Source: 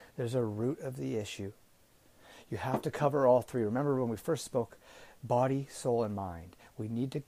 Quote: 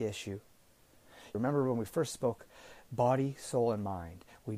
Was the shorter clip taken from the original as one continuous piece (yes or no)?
no